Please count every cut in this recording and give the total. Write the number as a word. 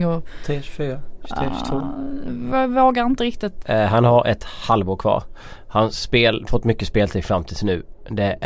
one